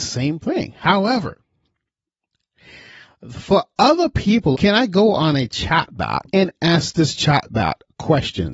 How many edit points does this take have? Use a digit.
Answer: 2